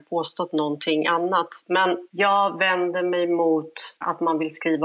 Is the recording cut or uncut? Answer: uncut